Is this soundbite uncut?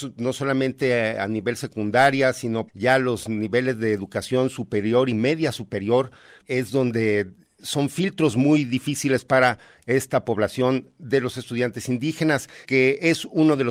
no; 3 cuts; at 2.7 s, 6.4 s, 12.6 s

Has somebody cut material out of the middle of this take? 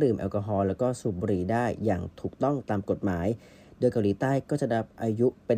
no; 0 cuts

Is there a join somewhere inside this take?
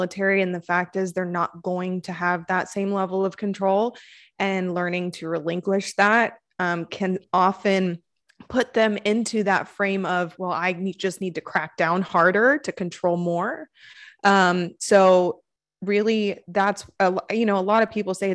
no; 0 cuts

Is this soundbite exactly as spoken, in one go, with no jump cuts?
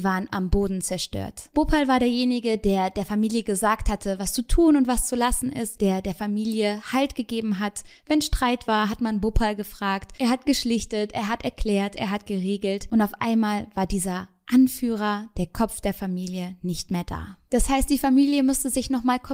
yes; 0 cuts

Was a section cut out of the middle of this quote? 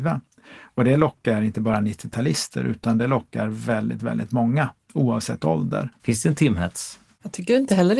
yes; 1 cut; at 6.0 s

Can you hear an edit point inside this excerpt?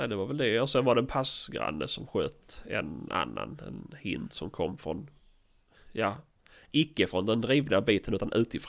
no; 0 cuts

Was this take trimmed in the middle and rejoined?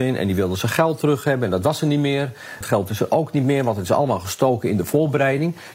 yes; 1 cut; at 2.6 s

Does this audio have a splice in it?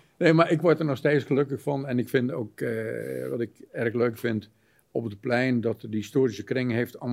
no; 0 cuts

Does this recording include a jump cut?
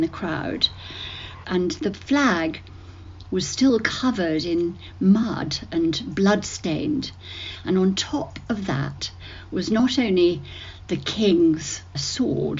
yes; 1 cut; at 1.4 s

